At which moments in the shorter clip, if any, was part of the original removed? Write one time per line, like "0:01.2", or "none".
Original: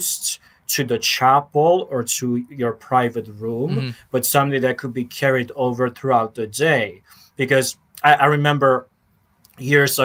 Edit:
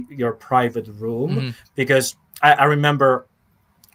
0:01.6